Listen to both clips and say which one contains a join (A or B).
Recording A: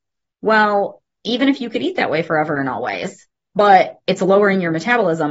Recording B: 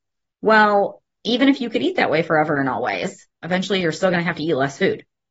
B